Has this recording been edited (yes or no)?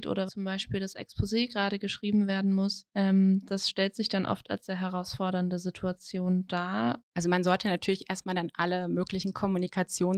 yes